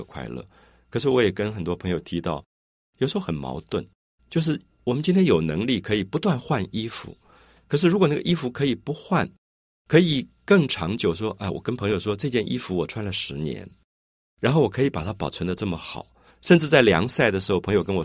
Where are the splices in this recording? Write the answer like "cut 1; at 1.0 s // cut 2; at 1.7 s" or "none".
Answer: cut 1; at 16.3 s